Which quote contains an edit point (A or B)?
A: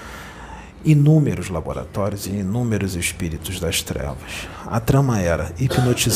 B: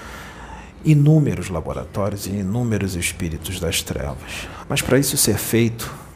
B